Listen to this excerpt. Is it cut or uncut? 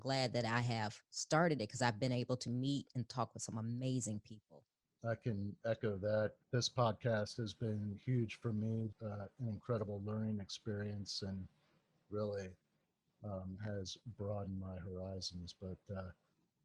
cut